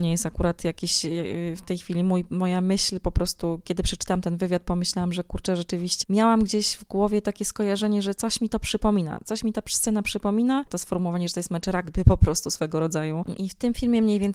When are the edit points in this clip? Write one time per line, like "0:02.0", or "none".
0:06.0
0:10.7
0:13.4